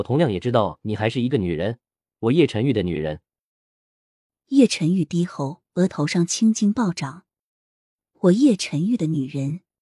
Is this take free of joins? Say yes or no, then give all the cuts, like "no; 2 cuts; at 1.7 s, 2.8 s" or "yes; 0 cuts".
yes; 0 cuts